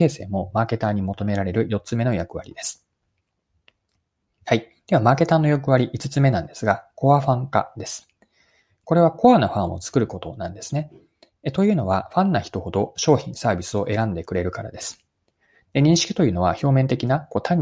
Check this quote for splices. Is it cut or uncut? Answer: cut